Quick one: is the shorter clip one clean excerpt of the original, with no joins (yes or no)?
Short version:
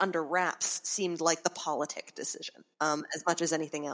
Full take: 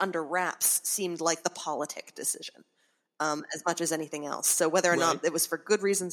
no